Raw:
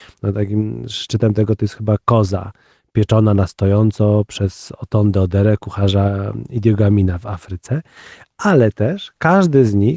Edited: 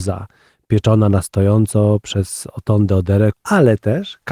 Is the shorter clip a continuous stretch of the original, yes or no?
no